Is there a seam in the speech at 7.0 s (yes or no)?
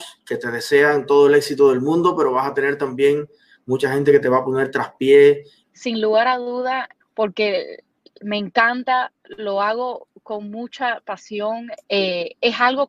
yes